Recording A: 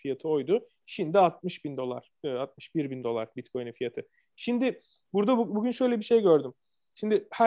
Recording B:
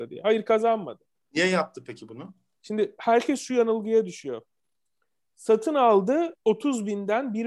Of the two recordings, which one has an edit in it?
B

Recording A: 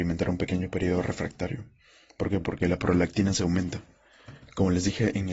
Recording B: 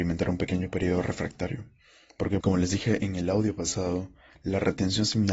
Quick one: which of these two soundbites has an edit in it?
B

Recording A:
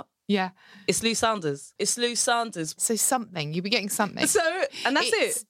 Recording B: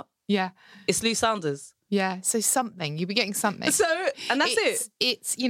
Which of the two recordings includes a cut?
A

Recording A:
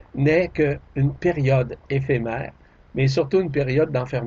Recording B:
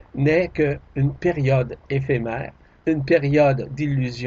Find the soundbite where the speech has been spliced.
A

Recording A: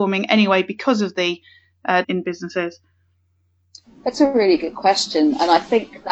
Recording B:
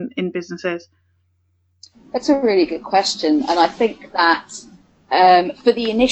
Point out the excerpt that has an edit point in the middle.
A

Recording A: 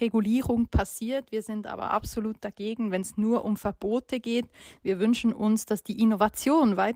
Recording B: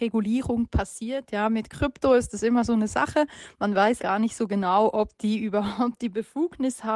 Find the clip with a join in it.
B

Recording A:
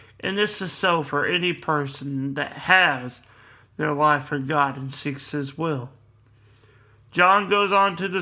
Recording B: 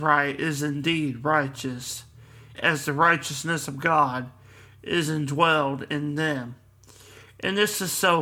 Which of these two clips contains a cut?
B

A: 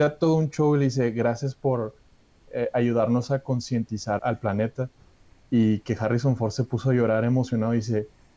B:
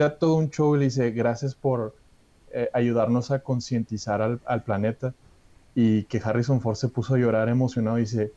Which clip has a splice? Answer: A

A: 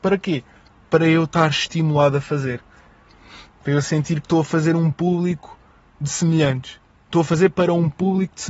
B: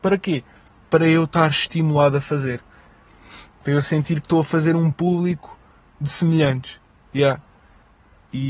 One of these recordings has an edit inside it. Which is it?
B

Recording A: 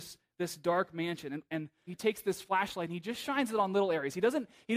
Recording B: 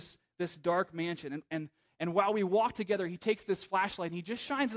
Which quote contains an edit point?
A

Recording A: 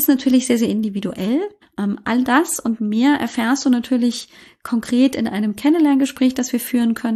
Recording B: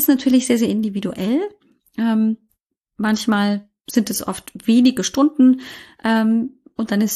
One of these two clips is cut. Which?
A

